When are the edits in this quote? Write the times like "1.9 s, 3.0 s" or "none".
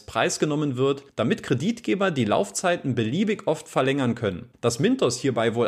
4.5 s